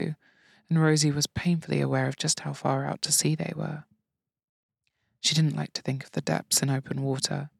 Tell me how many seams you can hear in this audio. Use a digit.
0